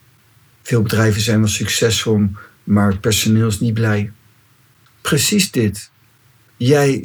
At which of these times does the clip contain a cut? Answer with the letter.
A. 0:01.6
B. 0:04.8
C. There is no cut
B